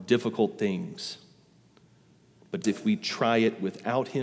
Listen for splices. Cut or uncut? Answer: cut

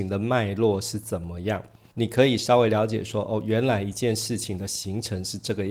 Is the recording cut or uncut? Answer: cut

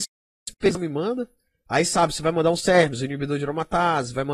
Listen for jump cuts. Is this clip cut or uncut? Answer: uncut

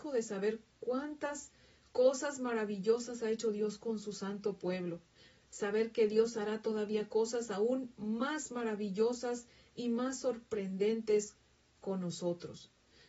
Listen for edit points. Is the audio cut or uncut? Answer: cut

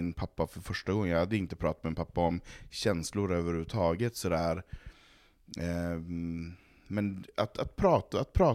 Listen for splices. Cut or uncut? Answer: uncut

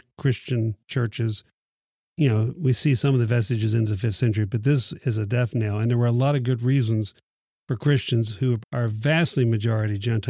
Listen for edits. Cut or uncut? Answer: cut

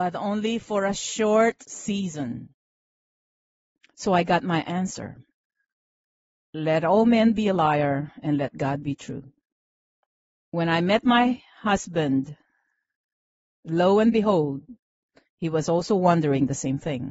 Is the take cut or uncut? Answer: uncut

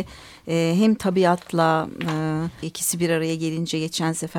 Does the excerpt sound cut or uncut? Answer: cut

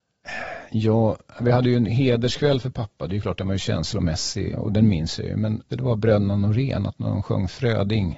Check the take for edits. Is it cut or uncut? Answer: cut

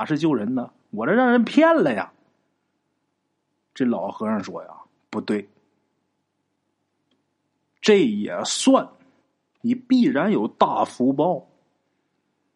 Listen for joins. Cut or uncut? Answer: cut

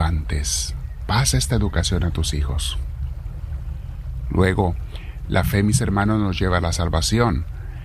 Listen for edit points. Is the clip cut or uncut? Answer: uncut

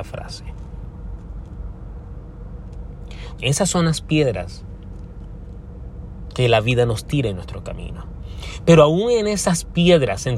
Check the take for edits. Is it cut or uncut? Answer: cut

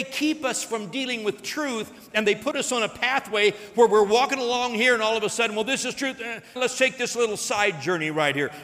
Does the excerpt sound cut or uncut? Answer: cut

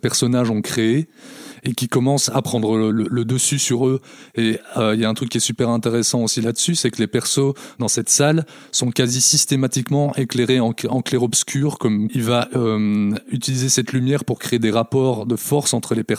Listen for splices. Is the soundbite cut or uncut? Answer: cut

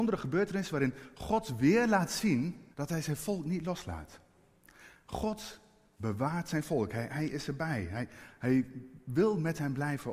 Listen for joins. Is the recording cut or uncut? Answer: cut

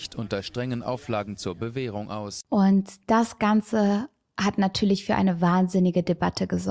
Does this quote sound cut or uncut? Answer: uncut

